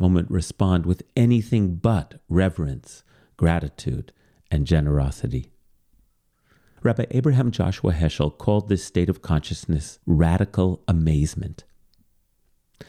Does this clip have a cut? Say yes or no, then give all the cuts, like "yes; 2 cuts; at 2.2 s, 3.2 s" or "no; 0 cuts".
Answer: yes; 2 cuts; at 6.8 s, 10.0 s